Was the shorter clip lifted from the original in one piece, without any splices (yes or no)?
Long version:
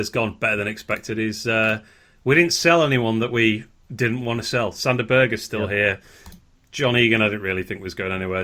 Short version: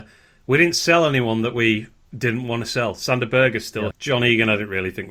no